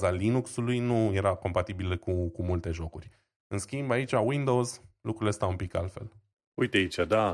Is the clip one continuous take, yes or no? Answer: yes